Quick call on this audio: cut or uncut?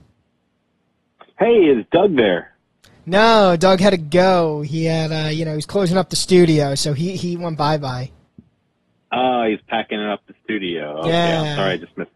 uncut